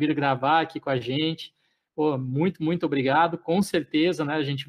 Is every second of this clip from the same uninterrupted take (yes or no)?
yes